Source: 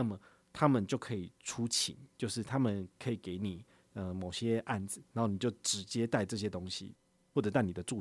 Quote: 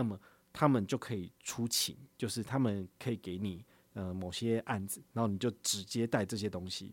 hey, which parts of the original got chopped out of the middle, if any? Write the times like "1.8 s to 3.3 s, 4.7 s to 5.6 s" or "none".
none

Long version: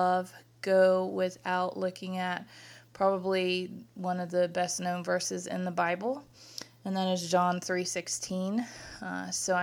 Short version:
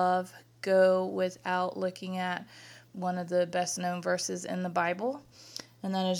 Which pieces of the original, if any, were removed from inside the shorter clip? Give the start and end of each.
2.9 s to 3.9 s

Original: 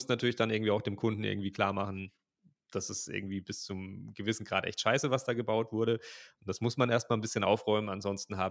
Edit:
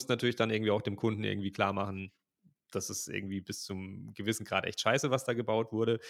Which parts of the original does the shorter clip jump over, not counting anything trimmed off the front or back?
none

